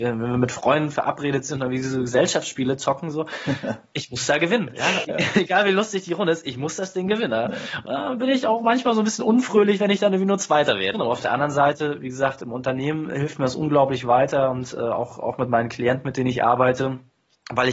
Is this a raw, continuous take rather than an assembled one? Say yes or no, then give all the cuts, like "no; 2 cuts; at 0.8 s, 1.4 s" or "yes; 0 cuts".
no; 2 cuts; at 5.0 s, 10.9 s